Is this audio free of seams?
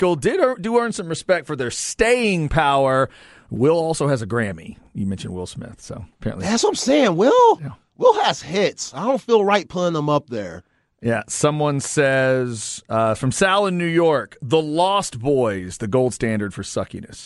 yes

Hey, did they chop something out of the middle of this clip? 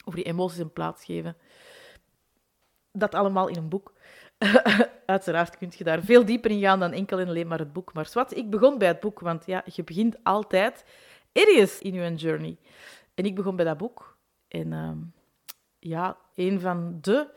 yes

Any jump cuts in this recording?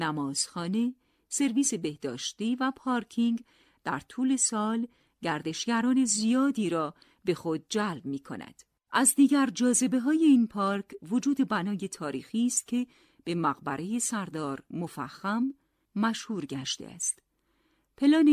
no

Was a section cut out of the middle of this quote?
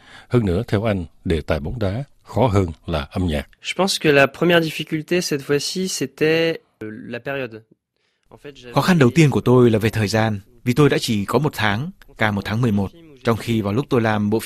yes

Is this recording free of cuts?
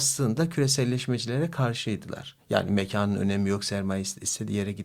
yes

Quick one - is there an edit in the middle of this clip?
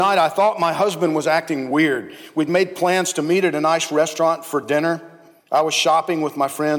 no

